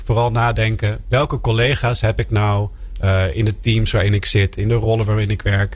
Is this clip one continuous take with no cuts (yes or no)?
yes